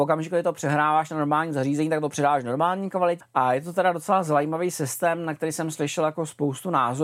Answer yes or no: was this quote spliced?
yes